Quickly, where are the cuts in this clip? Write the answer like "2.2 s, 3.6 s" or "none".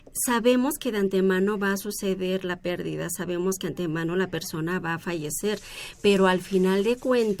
none

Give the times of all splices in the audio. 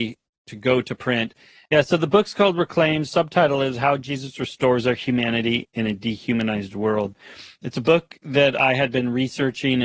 1.7 s

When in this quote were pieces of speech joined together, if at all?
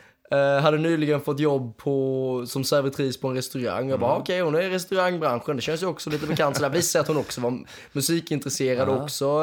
none

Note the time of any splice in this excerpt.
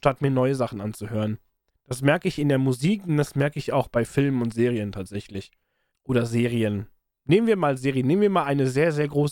1.7 s, 5.9 s

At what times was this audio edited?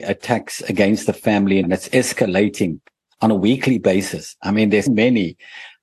1.6 s, 4.9 s

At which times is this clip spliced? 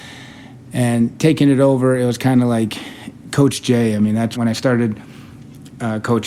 4.4 s

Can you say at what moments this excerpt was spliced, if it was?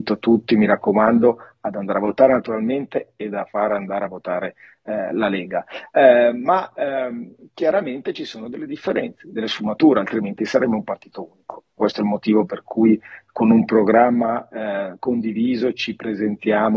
11.8 s

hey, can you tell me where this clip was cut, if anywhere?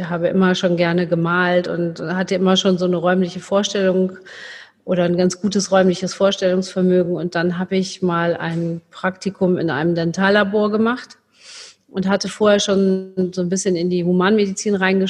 none

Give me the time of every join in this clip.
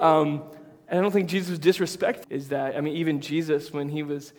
2.2 s

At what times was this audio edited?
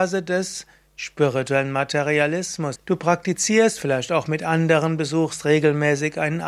2.8 s

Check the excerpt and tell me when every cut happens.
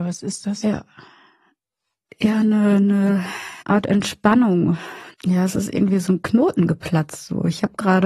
3.6 s, 5.1 s

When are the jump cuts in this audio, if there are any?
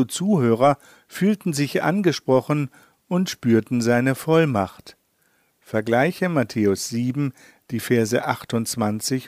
none

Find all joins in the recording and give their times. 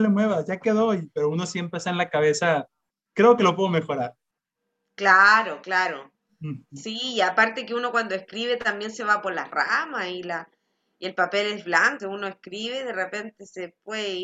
12.0 s

